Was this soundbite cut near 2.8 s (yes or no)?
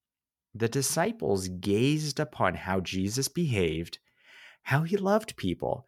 no